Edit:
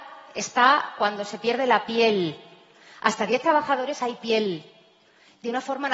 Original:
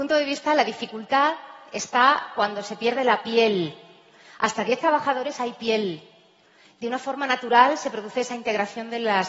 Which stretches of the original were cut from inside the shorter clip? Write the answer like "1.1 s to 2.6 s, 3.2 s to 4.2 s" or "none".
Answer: none